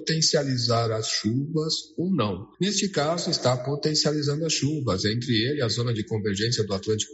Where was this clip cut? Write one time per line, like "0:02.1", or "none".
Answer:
none